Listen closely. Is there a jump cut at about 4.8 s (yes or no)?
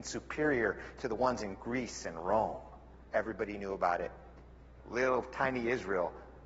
yes